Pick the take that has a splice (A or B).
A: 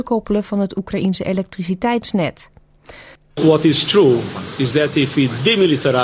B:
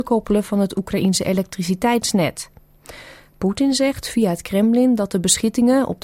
A